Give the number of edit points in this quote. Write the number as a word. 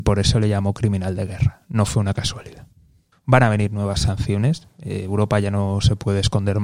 one